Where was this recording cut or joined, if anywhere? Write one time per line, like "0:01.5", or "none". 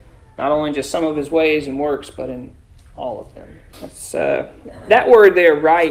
0:03.7